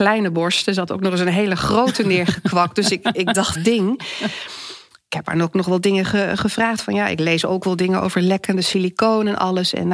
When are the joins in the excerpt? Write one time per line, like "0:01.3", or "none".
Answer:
0:03.6